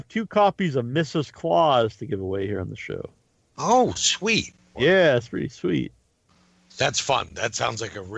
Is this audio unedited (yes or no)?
no